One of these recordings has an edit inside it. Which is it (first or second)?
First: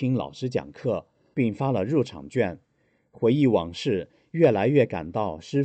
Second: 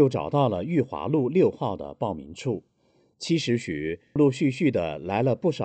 second